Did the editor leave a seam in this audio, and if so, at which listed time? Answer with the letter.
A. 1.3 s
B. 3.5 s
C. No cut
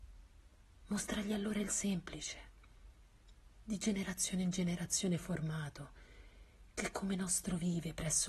C